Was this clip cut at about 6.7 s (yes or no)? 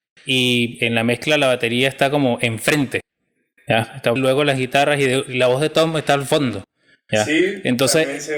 no